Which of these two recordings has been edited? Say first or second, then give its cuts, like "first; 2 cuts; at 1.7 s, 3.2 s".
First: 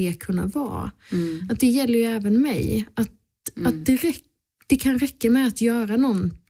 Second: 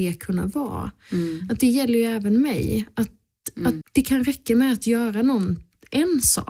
second; 1 cut; at 3.8 s